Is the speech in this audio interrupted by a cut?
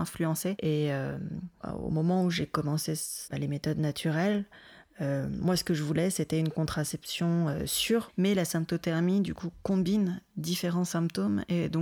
no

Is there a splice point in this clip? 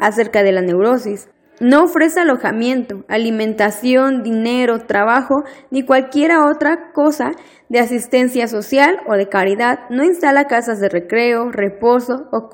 no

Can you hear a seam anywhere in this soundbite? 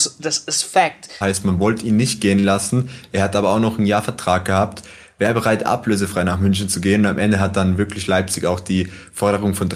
yes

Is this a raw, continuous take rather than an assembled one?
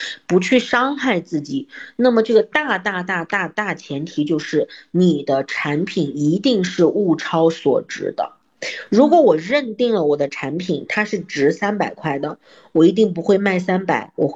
yes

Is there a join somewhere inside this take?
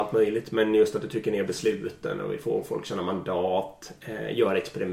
no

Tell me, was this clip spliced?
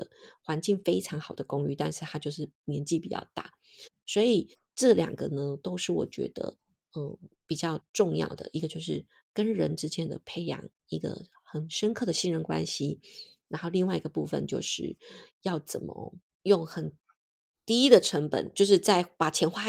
no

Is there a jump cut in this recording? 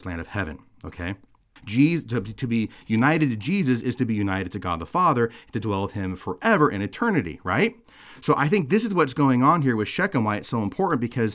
yes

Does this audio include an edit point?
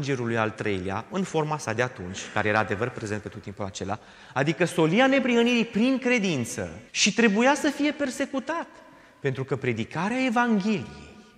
yes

